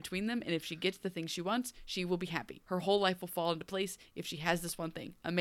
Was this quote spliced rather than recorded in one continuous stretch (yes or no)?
yes